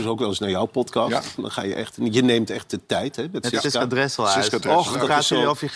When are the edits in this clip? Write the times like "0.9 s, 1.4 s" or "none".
1.4 s